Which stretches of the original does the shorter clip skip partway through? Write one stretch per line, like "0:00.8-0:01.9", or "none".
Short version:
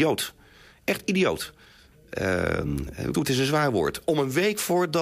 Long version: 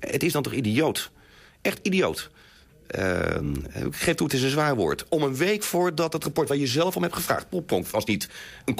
0:03.9-0:04.2